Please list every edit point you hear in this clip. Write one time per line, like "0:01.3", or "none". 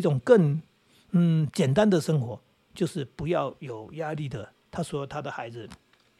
none